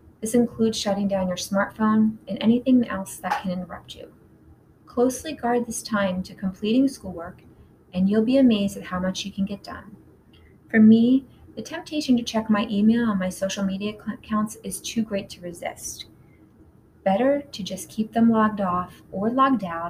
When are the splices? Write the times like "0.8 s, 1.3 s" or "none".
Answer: none